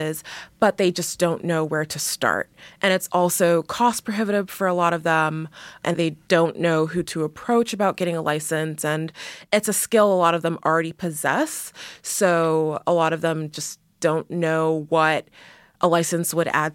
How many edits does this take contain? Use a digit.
0